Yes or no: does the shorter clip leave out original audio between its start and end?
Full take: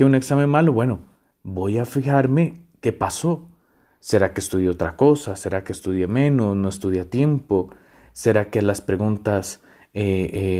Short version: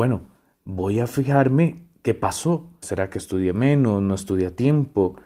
yes